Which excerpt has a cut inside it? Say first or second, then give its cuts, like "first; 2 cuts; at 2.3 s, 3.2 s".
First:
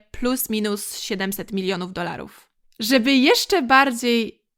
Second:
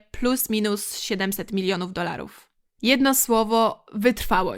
first; 1 cut; at 2.6 s